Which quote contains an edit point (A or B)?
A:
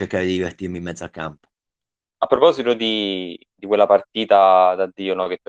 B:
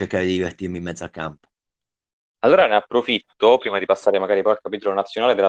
A